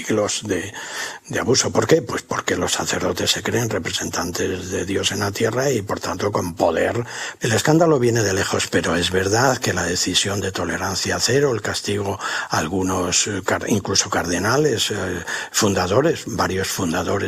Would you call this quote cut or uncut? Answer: uncut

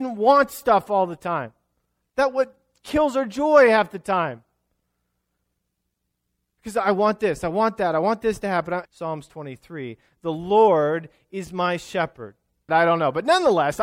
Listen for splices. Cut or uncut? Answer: cut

